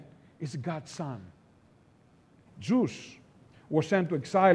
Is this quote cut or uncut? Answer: cut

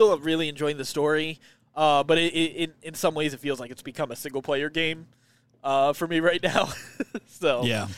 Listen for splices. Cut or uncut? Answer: uncut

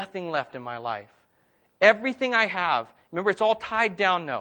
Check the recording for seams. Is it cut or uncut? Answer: uncut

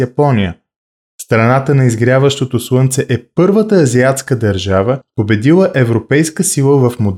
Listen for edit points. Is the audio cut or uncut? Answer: uncut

